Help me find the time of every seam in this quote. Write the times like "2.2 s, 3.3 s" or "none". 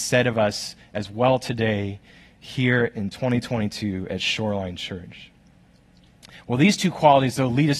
none